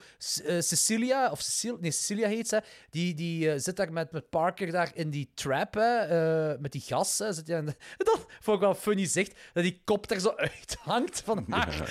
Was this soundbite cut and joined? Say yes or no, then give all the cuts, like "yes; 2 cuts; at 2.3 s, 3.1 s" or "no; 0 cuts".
yes; 1 cut; at 4.1 s